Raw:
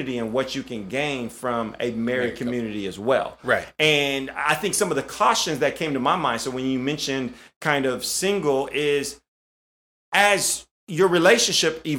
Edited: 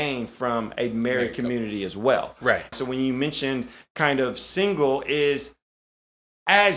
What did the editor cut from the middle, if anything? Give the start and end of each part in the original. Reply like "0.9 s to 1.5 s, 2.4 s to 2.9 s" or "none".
3.7 s to 6.4 s